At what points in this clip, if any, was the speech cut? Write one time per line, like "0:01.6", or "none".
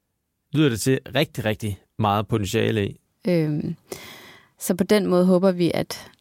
0:03.1